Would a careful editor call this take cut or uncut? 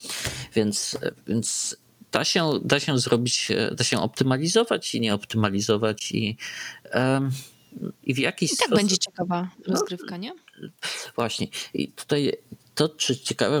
cut